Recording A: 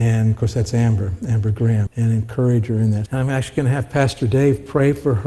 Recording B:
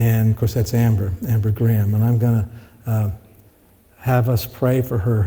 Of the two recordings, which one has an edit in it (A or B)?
A